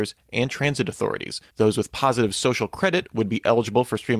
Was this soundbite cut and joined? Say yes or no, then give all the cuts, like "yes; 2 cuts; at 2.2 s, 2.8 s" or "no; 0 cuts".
yes; 1 cut; at 1.5 s